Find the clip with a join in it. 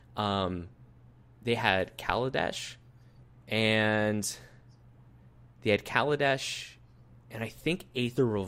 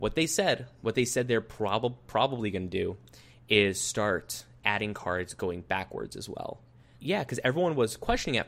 second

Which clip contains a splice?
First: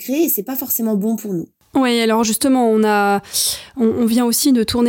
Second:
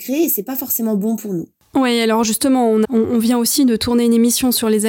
second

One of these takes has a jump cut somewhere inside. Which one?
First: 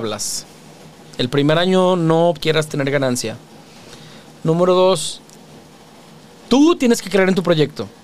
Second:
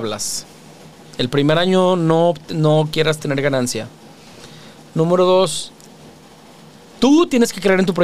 first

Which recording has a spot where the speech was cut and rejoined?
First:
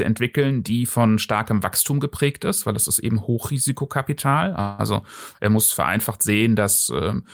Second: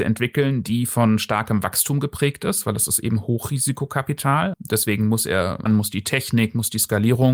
second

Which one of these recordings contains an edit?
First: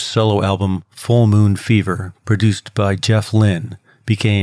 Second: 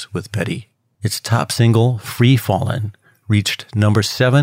second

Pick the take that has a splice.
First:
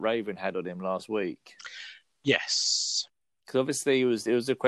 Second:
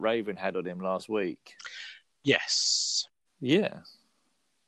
second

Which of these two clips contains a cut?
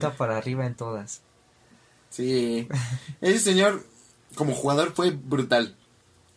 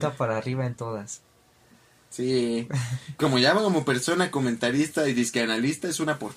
second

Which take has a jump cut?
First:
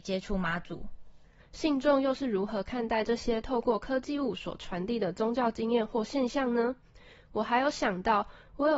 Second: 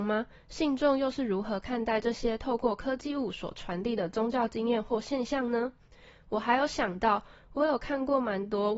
first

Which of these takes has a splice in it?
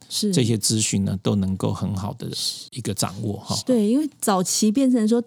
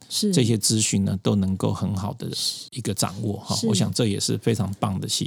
first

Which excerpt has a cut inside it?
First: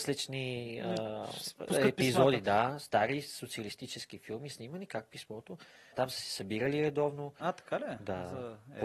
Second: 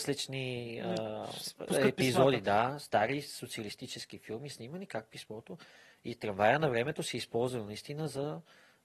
first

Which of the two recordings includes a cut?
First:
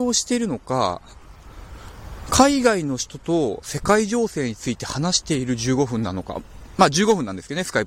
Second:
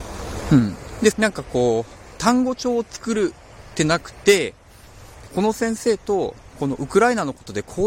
second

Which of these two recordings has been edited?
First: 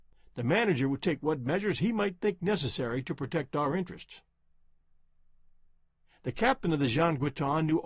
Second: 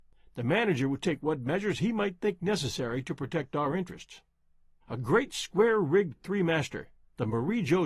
second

